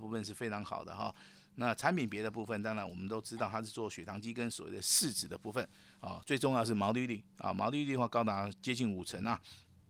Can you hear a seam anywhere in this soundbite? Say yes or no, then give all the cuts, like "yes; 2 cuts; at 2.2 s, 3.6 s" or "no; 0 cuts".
no; 0 cuts